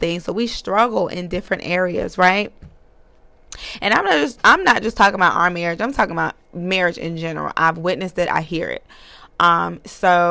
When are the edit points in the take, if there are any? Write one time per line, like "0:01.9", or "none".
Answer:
0:08.3